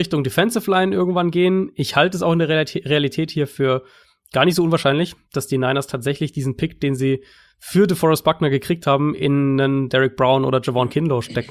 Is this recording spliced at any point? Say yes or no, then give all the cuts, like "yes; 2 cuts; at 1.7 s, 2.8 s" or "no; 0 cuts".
no; 0 cuts